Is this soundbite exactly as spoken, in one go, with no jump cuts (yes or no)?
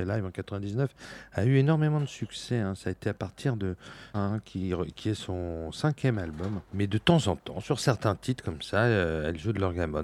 no